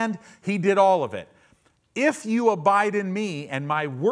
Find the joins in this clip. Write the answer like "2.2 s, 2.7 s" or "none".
none